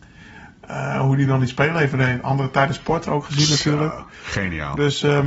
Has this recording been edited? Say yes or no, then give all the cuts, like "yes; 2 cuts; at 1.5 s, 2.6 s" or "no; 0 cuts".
no; 0 cuts